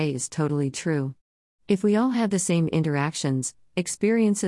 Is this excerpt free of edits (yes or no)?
yes